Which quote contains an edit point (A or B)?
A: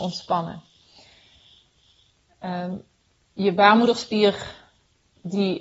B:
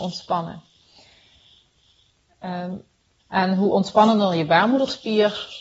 B